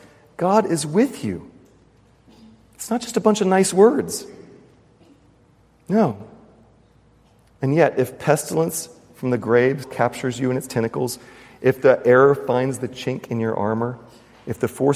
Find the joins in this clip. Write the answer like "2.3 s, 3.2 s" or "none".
9.8 s